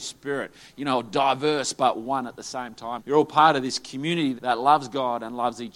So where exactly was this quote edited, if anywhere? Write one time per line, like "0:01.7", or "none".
0:03.0
0:04.4